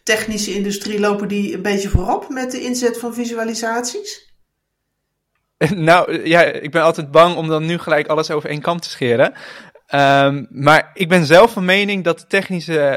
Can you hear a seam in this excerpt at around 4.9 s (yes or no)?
no